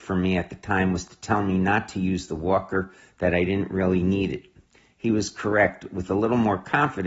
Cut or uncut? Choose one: uncut